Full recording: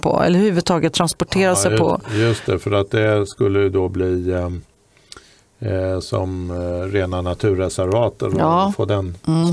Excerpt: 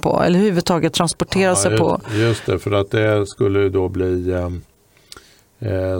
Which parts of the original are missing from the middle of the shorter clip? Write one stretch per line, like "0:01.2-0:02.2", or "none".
none